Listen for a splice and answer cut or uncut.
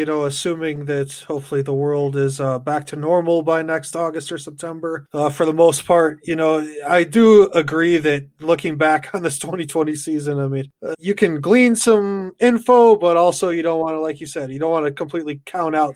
cut